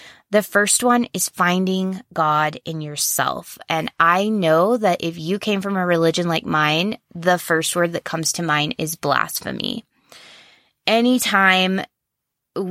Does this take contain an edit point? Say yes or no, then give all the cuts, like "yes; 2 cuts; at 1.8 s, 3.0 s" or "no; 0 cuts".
no; 0 cuts